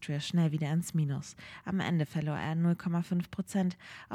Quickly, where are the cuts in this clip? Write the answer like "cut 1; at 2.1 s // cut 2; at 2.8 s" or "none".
none